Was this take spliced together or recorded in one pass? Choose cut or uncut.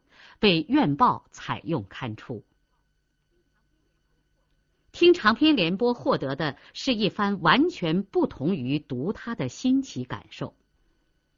uncut